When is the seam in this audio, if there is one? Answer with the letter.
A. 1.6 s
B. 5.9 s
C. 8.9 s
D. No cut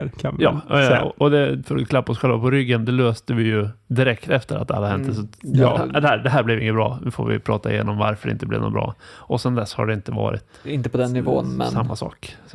D